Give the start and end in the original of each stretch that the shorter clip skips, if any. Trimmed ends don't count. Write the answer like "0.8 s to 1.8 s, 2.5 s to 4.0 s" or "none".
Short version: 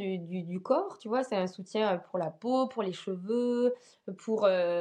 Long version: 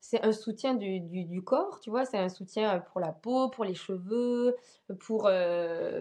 none